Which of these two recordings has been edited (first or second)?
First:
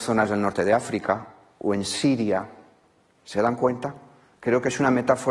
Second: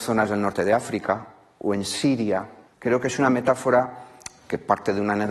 second